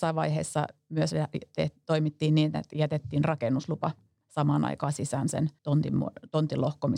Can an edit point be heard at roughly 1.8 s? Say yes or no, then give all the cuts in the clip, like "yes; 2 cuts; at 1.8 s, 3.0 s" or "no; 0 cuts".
no; 1 cut; at 5.6 s